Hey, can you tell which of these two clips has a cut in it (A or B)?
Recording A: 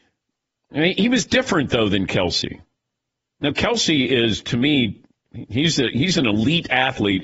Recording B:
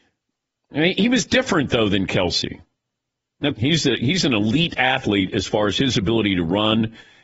B